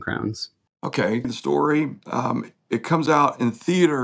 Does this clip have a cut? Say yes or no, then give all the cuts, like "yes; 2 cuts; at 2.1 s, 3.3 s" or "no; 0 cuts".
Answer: yes; 1 cut; at 1.2 s